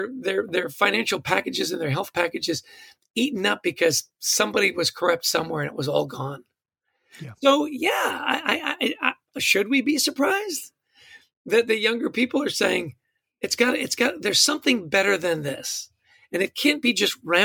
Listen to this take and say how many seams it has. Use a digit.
0